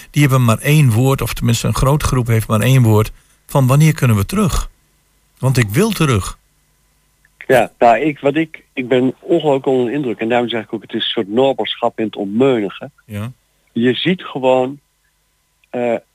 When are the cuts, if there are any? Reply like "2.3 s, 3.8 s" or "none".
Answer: 7.8 s